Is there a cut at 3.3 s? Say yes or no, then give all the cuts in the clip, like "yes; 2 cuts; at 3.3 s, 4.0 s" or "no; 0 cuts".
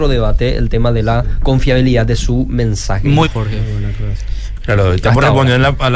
yes; 2 cuts; at 3.3 s, 4.6 s